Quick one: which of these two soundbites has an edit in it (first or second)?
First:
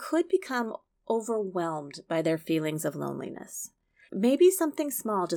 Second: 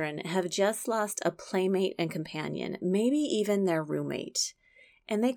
first